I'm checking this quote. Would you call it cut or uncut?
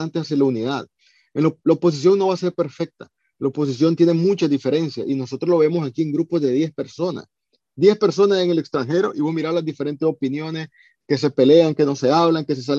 uncut